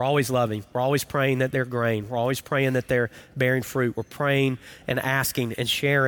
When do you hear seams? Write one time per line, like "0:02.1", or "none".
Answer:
none